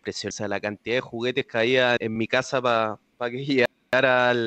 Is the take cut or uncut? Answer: cut